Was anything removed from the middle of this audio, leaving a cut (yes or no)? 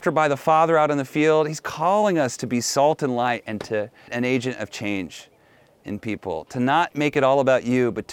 yes